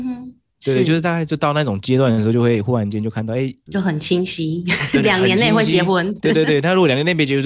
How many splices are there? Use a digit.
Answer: 1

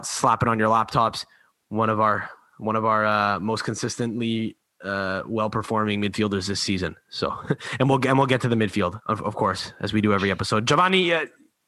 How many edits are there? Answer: 0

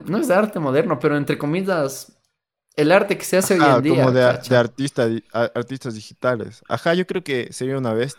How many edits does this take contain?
0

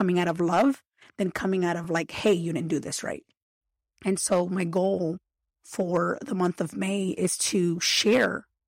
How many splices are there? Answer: 0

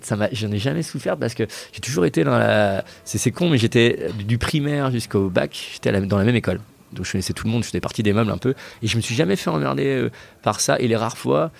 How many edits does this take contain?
0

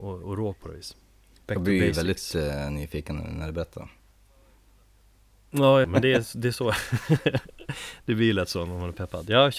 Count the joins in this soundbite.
1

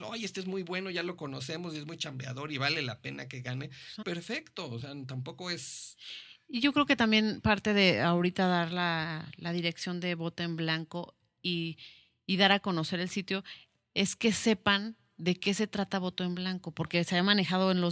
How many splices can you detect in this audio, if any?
1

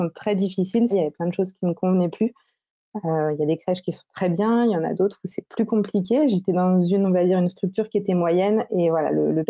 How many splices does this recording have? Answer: 1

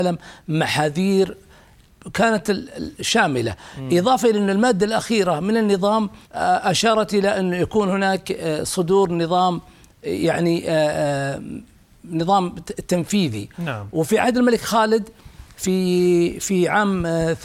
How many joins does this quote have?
1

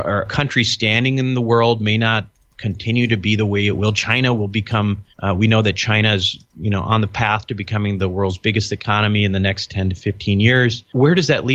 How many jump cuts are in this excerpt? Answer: 1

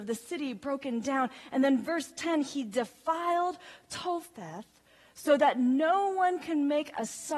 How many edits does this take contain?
0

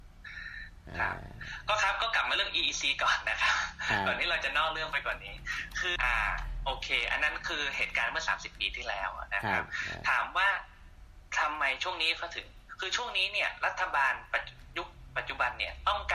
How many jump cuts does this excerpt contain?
1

